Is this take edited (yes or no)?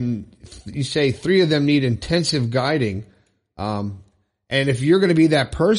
no